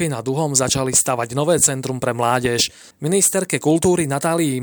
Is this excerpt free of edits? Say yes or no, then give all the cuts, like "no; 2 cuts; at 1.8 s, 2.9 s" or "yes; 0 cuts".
no; 1 cut; at 2.9 s